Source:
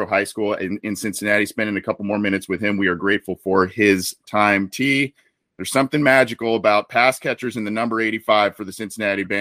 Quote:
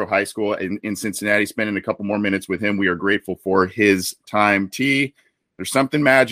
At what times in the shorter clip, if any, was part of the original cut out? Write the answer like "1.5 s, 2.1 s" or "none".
none